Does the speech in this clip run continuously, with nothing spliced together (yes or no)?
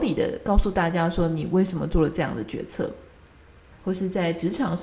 no